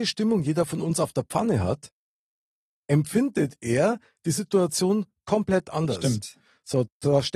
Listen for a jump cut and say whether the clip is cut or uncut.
uncut